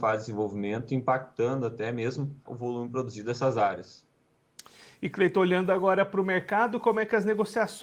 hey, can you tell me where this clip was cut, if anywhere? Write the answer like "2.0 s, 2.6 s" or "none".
2.5 s